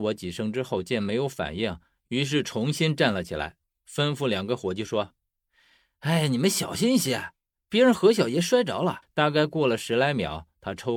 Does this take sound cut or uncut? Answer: cut